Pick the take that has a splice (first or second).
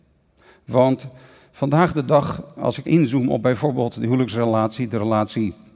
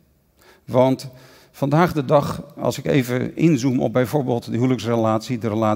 first